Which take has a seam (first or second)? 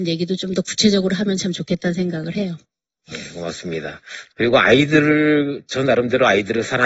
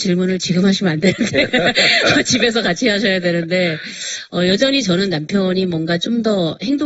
first